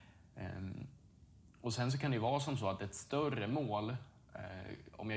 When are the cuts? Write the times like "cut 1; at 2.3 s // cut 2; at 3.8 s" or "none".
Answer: none